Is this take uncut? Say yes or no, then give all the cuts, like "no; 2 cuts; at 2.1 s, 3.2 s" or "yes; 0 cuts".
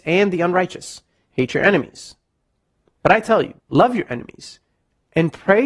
no; 2 cuts; at 1.3 s, 3.6 s